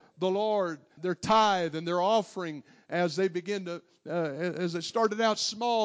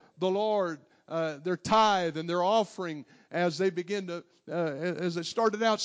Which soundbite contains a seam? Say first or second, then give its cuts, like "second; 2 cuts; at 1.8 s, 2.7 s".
first; 1 cut; at 1.0 s